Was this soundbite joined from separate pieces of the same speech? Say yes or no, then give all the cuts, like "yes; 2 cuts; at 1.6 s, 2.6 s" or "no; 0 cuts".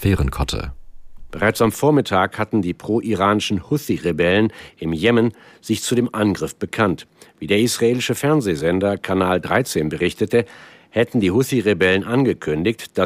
no; 0 cuts